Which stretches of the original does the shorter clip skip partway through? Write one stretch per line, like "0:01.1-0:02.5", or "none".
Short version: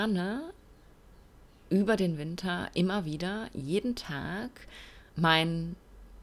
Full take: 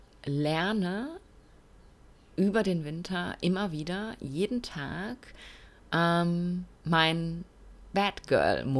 0:05.8-0:06.8